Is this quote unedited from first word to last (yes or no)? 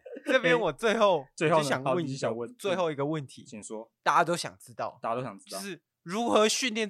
yes